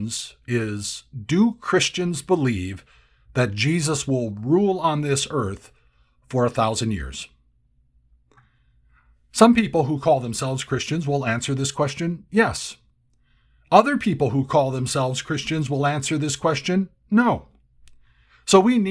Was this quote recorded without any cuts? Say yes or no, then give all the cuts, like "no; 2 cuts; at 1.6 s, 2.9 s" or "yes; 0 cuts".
yes; 0 cuts